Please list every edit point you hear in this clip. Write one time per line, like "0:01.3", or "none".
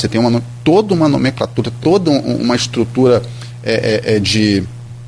none